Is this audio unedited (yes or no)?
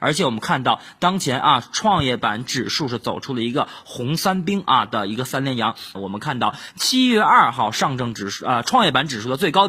no